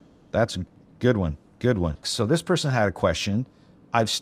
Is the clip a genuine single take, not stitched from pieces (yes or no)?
no